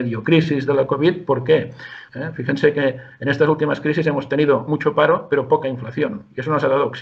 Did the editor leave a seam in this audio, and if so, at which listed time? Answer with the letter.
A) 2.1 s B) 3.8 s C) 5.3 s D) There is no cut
A